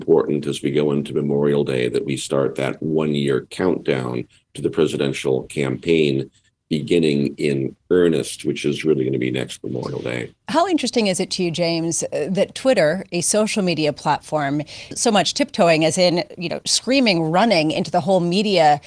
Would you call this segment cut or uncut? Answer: cut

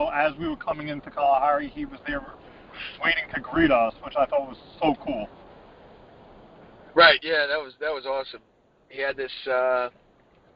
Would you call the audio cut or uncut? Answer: uncut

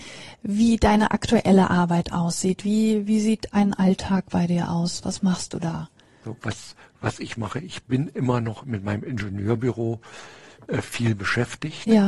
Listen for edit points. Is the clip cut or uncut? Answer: uncut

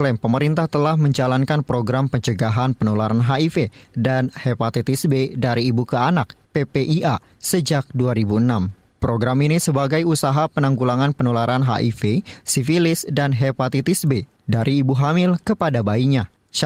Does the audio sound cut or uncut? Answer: cut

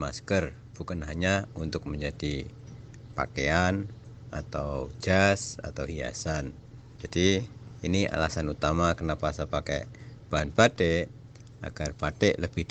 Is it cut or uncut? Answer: uncut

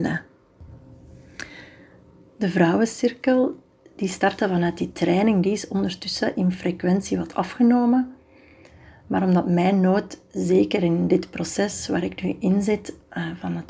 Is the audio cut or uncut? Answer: uncut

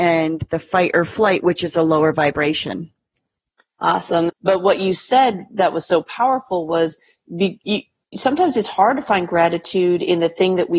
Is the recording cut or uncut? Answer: cut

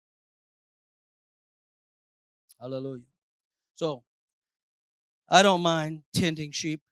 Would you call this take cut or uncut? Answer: uncut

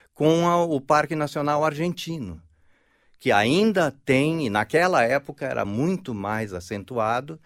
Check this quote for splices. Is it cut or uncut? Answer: uncut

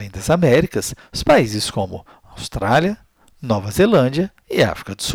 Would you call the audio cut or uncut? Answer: uncut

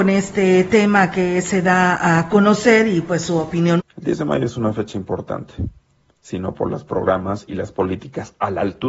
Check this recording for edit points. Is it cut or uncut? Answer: cut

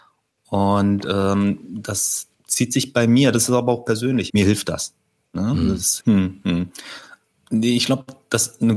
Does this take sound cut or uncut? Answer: cut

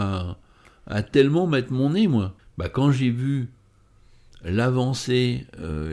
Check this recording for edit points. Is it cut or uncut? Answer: cut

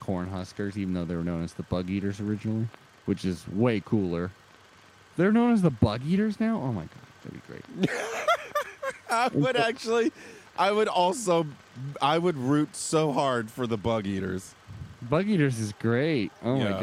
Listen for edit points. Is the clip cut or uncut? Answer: uncut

